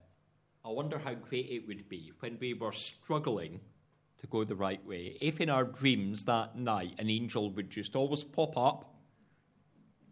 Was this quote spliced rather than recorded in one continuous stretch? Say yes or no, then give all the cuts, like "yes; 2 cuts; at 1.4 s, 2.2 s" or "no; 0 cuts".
no; 0 cuts